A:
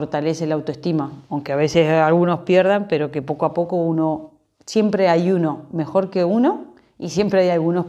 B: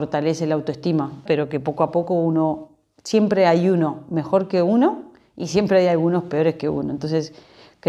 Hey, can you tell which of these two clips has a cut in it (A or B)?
B